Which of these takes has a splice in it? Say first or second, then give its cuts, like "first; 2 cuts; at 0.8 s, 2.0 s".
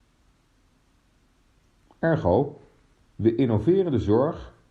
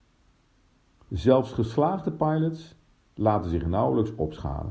second; 1 cut; at 1.0 s